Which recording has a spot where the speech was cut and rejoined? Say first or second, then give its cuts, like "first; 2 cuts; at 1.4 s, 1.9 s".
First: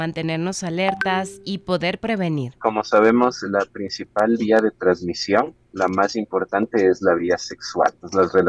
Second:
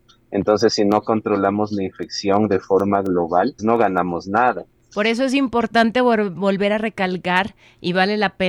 second; 2 cuts; at 3.6 s, 4.7 s